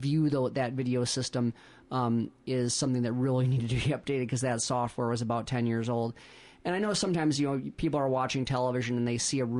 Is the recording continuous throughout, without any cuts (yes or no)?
yes